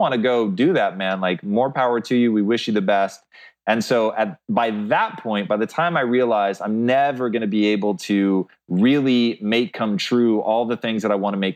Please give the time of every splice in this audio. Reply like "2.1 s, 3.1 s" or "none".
none